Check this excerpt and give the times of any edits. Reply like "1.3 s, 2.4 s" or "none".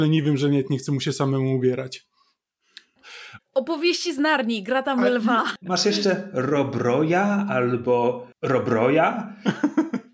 3.4 s, 5.6 s, 8.3 s